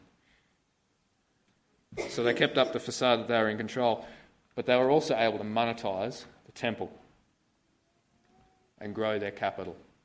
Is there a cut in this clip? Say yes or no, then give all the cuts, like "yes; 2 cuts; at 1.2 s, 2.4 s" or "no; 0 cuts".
no; 0 cuts